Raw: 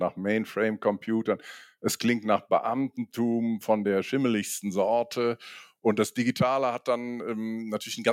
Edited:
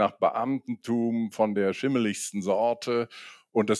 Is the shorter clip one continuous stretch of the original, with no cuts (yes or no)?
yes